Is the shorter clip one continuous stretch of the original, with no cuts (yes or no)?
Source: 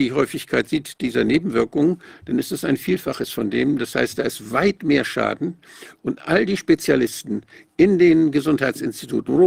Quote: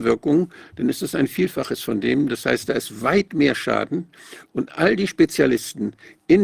yes